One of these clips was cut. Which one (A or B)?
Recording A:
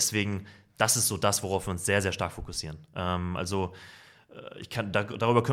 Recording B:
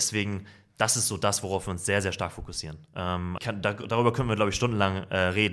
B